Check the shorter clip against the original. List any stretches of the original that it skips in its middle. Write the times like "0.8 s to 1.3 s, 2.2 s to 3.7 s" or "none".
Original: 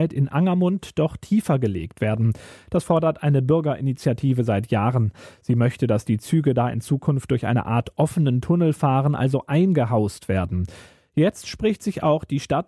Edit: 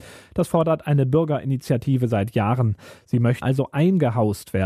5.8 s to 9.2 s